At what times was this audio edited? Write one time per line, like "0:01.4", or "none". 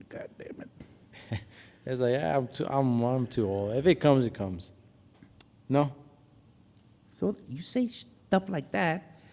0:07.4